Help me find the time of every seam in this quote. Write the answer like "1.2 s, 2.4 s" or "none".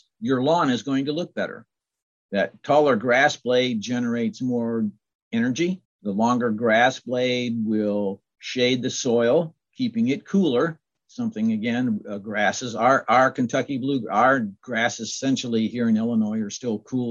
5.8 s